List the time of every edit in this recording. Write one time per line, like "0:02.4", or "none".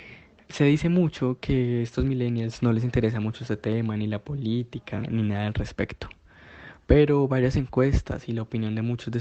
none